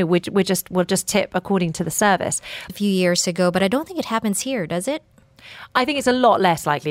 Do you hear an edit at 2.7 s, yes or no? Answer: yes